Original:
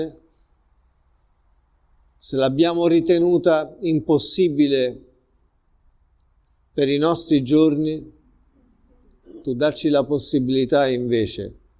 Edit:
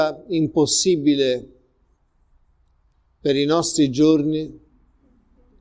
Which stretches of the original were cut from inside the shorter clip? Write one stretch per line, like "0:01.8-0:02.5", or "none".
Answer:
none

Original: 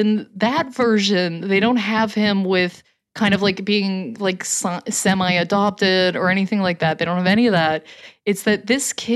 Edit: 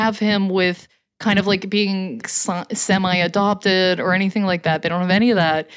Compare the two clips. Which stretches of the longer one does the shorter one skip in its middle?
0:04.2-0:04.4

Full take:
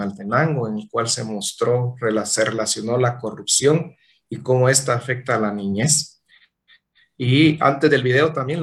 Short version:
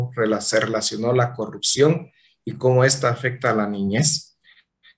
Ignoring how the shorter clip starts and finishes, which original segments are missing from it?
none

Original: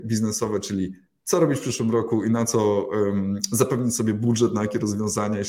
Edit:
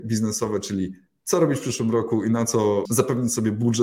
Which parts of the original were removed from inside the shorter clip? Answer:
0:02.9-0:03.5

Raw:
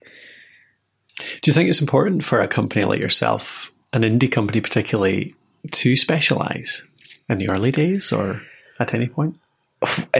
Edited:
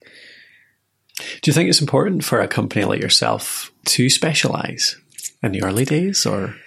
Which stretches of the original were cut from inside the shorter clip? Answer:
0:03.8-0:05.7

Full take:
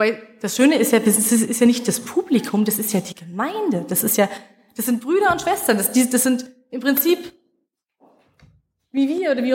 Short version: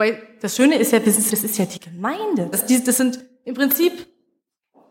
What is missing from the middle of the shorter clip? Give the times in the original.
0:01.3-0:02.6
0:03.9-0:05.8

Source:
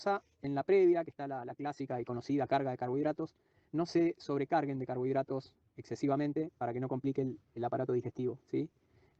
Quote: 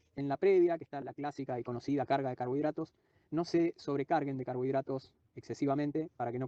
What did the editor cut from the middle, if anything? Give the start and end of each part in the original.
0:01.3-0:01.4

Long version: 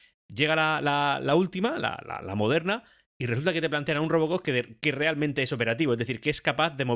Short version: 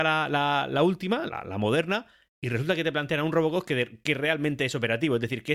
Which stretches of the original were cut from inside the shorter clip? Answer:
0:01.8-0:02.0

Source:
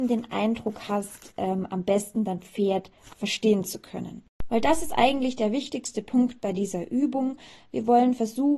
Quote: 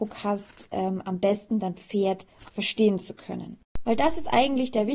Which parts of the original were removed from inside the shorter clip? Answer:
none

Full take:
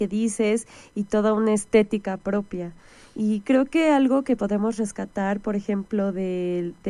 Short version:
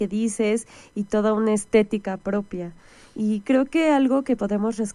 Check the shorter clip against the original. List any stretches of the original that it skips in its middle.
none

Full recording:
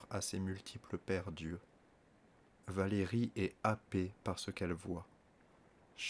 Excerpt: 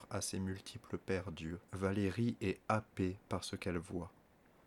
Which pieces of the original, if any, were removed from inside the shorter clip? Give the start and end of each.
0:01.6-0:02.6

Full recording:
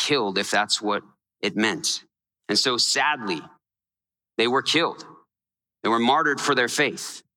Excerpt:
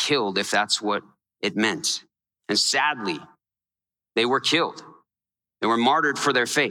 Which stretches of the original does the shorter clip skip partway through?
0:02.5-0:02.8

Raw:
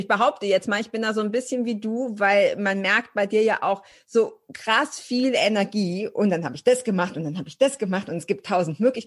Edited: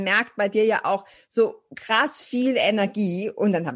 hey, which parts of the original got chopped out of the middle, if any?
none

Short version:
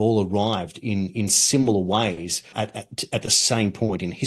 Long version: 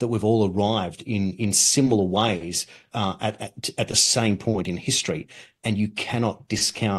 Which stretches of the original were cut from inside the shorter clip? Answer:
0:02.8-0:03.2

